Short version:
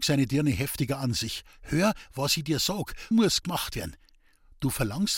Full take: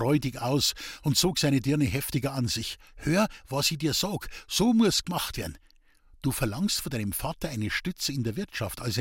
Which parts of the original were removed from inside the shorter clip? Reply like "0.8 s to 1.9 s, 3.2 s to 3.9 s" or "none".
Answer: 4.5 s to 4.7 s